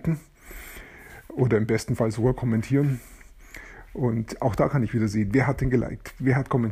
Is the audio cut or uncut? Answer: uncut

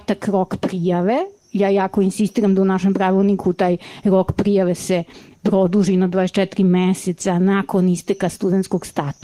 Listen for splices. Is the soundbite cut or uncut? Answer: uncut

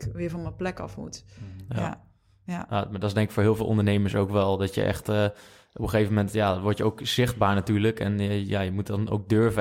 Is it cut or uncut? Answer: uncut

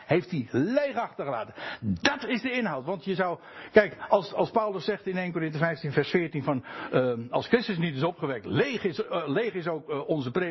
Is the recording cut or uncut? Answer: uncut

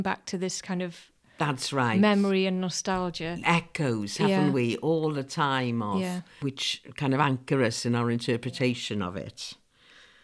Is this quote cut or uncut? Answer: cut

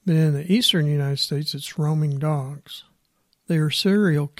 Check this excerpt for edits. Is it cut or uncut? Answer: cut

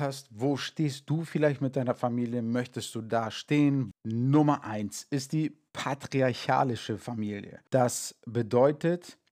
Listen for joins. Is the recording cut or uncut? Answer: cut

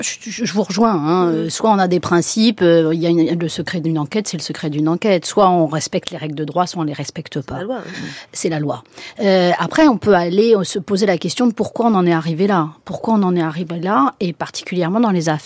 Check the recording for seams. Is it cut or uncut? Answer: uncut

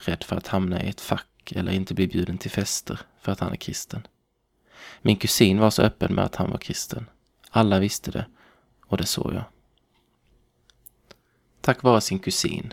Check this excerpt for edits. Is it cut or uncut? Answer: cut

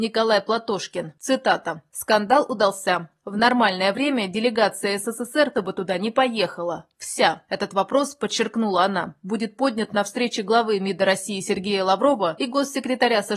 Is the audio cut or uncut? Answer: cut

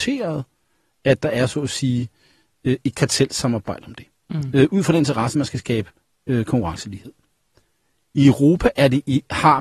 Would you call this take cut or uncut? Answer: uncut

